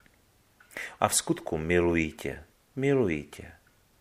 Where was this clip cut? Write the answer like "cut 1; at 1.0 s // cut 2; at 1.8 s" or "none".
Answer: cut 1; at 1.0 s // cut 2; at 2.7 s